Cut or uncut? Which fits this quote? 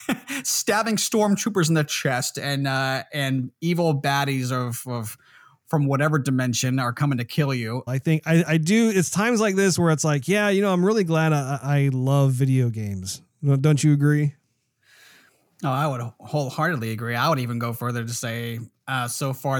cut